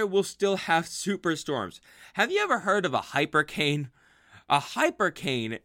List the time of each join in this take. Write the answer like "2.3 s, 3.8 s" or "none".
none

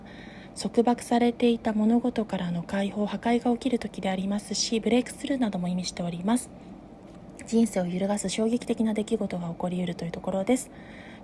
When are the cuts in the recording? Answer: none

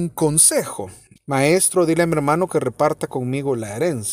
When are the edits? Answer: 1.2 s

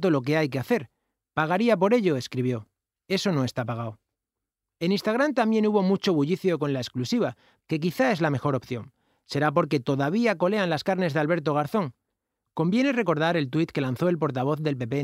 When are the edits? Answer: 7.6 s

